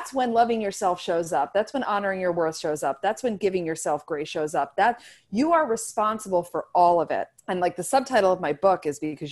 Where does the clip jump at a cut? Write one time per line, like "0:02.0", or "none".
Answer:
0:07.4

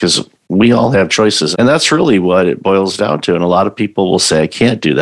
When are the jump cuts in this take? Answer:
0:01.5

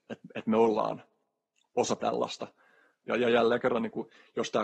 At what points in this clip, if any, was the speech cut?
0:03.0

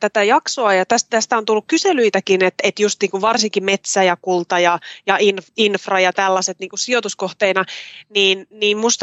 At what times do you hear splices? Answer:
none

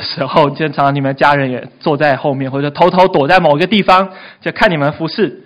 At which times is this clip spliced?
none

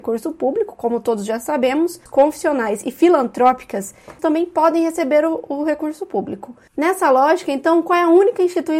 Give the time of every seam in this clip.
0:02.1
0:04.2

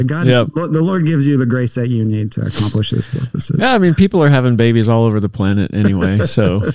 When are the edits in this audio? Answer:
none

